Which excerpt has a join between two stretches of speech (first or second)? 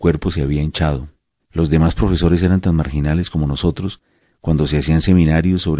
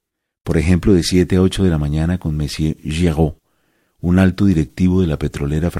first